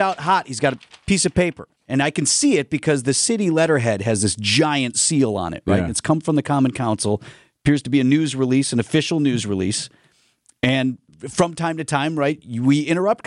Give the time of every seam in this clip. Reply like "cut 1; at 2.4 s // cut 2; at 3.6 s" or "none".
none